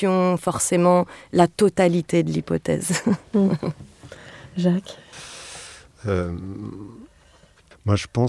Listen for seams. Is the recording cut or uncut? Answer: uncut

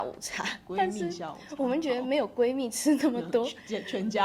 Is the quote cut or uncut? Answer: uncut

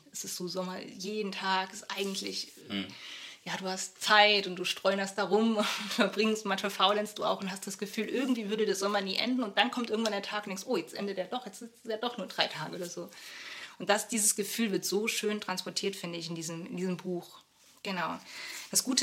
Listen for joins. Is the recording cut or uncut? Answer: uncut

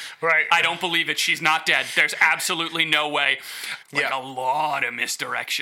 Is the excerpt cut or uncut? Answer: cut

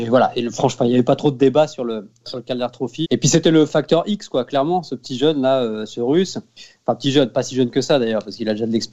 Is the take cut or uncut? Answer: cut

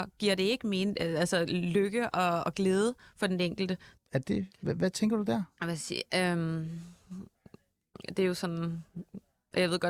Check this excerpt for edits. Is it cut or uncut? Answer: cut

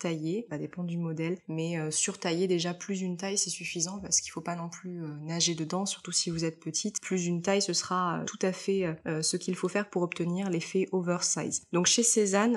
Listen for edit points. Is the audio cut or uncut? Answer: uncut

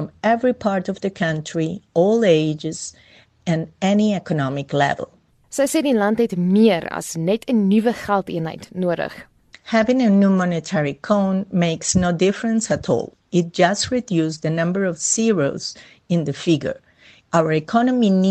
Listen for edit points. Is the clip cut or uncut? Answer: uncut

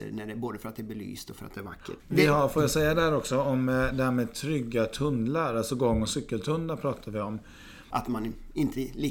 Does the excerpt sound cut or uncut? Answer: cut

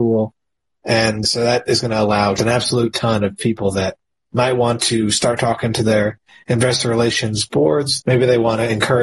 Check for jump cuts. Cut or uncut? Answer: cut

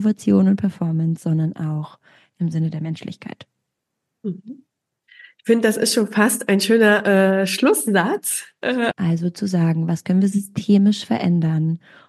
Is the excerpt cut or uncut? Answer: cut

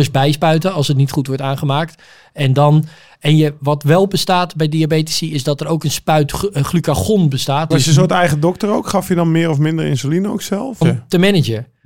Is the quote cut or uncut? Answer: cut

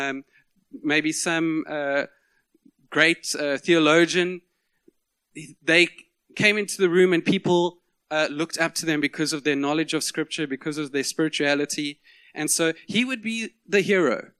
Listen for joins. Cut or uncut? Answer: uncut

